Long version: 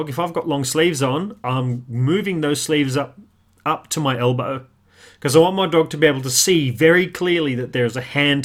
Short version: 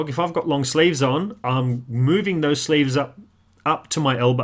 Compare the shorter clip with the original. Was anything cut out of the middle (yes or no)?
no